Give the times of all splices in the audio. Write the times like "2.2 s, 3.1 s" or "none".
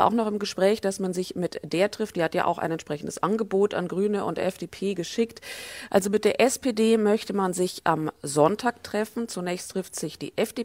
5.9 s